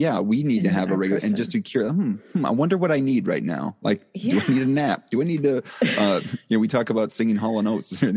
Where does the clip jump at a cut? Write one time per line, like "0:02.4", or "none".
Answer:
none